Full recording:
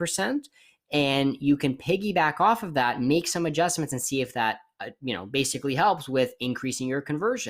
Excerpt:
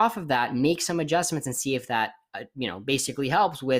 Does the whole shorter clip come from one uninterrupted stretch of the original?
yes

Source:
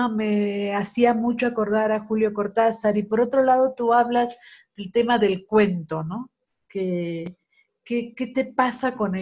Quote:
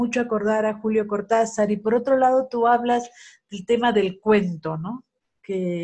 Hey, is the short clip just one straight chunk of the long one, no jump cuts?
yes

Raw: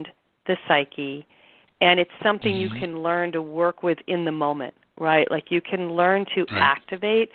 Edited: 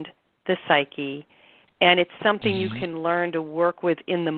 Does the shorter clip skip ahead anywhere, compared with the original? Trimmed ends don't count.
no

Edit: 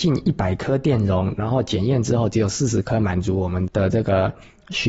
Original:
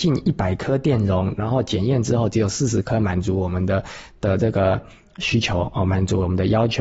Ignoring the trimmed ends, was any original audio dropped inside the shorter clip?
yes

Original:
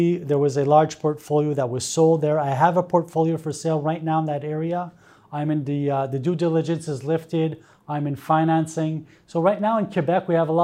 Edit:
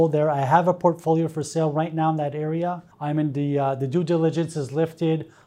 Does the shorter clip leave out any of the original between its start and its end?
yes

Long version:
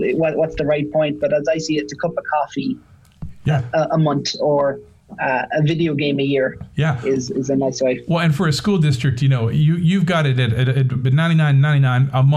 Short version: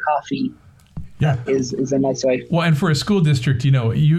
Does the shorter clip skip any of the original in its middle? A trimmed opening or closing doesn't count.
yes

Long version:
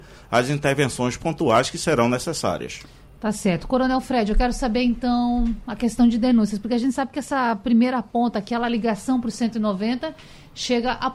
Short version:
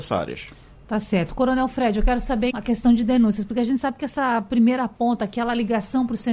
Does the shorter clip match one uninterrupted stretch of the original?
no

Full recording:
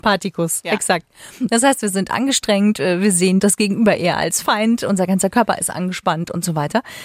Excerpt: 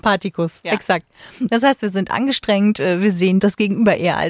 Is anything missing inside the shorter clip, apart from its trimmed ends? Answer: no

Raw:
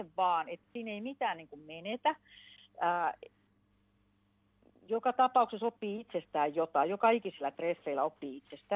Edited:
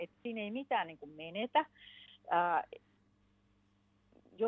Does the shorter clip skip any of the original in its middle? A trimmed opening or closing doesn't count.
no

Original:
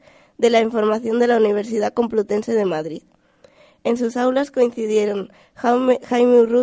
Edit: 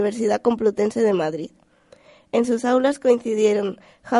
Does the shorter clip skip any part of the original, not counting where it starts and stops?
no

